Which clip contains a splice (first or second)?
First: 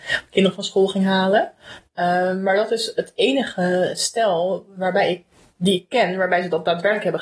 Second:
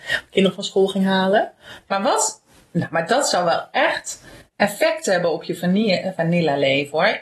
second